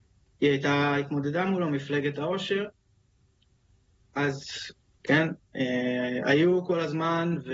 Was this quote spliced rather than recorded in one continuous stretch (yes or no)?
yes